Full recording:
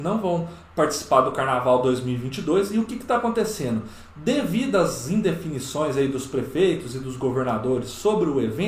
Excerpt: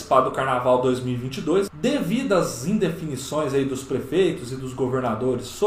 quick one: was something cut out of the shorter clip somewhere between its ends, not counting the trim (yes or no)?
yes